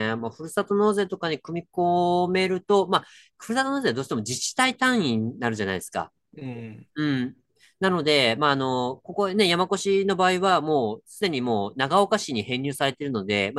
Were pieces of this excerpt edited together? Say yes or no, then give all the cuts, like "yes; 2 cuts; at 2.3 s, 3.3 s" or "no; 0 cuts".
no; 0 cuts